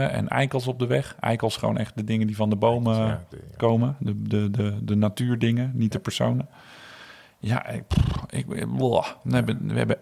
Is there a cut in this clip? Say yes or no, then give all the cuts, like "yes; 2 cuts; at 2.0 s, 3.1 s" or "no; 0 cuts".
no; 0 cuts